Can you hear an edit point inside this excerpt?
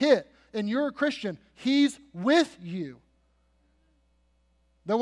no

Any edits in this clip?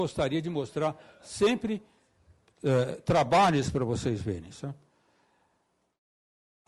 no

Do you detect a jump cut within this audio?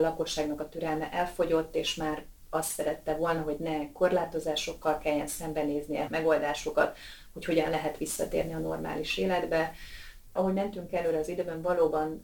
yes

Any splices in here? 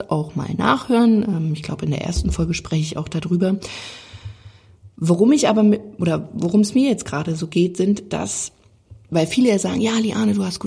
no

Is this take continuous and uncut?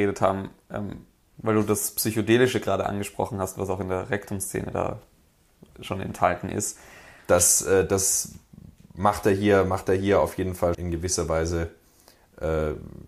no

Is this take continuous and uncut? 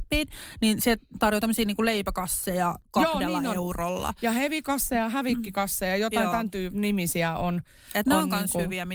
yes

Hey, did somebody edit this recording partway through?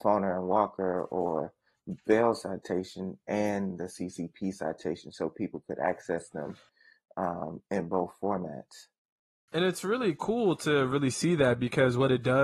yes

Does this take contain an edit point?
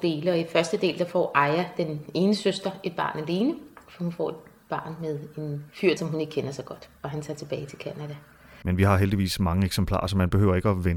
yes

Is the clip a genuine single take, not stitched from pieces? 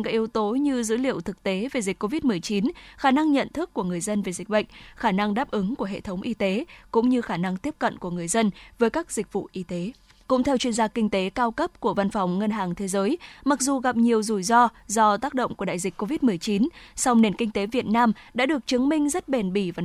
no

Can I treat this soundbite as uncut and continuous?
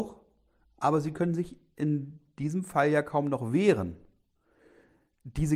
yes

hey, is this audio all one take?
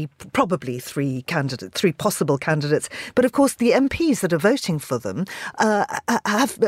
no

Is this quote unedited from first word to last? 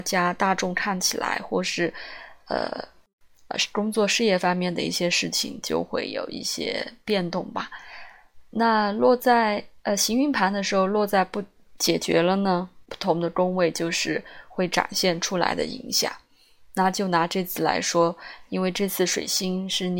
no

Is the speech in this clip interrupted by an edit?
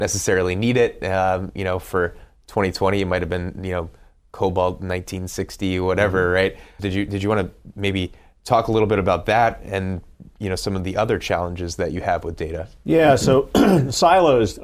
yes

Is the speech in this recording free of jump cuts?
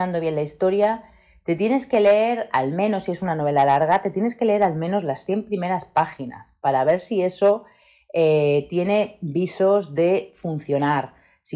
yes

